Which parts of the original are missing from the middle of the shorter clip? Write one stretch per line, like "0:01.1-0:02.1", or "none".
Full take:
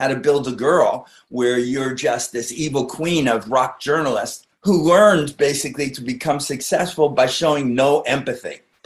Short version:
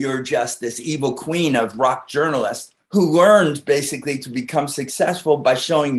none

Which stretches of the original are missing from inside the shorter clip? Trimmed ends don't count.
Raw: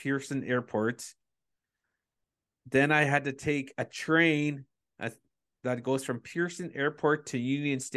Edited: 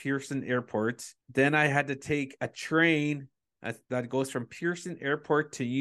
0:01.2-0:02.6
0:05.2-0:05.6

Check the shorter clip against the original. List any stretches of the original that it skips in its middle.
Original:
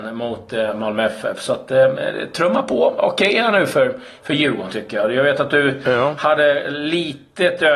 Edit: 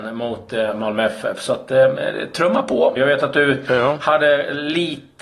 0:03.0-0:05.1

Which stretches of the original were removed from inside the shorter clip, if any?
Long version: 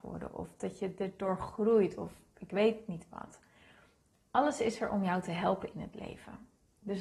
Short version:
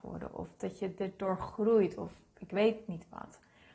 none

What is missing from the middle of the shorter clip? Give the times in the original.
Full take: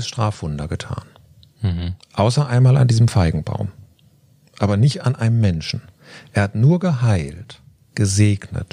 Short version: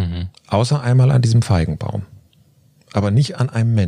none

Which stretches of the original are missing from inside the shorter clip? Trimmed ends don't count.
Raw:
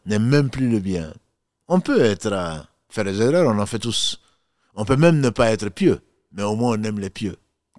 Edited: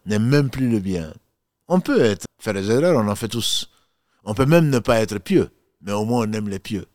0:02.2-0:02.8

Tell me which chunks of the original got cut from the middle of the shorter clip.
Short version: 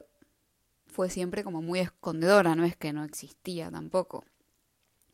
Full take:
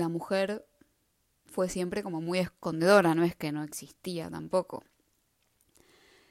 none

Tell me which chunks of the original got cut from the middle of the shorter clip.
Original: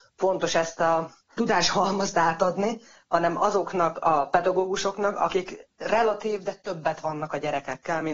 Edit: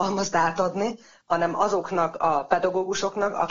none

